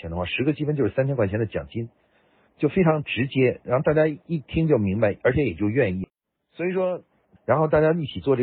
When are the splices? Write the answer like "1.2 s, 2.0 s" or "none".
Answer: 7.4 s